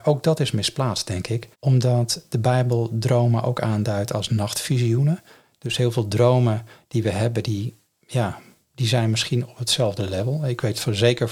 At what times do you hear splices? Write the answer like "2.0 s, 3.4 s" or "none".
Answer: 1.5 s